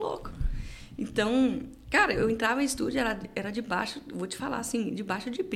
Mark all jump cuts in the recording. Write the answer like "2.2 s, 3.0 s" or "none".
none